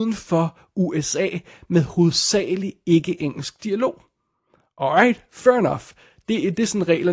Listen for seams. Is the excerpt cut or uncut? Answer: uncut